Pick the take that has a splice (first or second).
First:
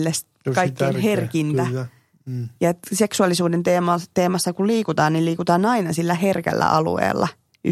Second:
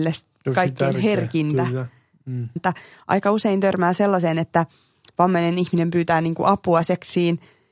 second